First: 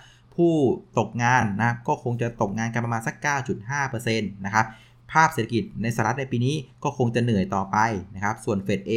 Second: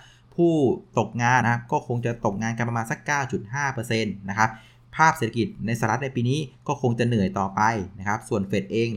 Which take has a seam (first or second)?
second